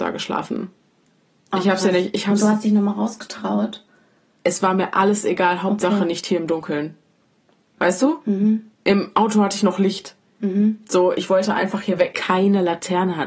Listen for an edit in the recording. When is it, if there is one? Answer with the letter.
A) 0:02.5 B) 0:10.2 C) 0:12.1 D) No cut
C